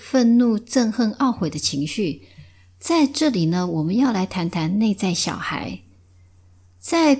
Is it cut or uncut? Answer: uncut